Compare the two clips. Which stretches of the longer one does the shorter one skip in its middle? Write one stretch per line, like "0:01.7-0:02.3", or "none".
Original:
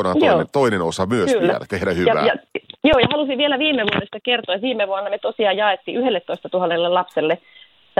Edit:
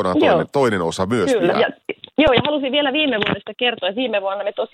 0:01.5-0:02.2